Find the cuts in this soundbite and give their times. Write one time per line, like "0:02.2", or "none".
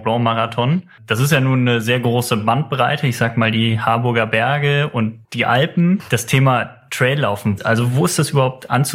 0:05.2
0:07.6